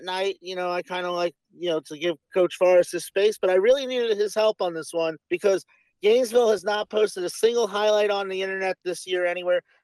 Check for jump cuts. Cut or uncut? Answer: cut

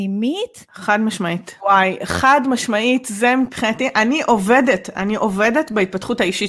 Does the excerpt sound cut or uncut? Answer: cut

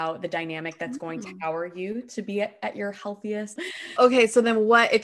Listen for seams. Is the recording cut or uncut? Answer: cut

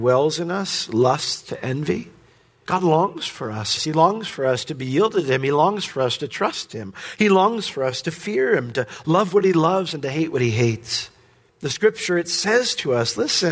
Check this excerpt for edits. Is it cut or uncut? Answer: cut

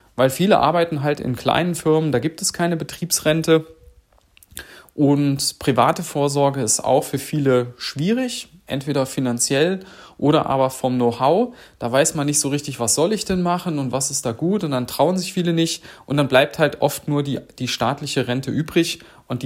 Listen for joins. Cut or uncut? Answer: uncut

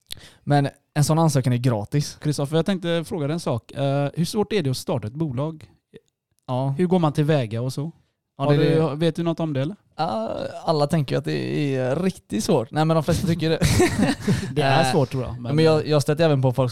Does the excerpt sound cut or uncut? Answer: cut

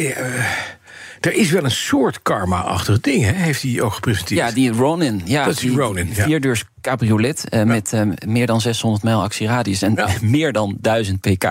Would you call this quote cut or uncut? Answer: uncut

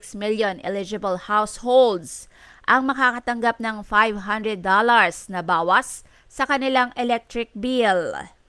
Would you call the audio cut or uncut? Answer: uncut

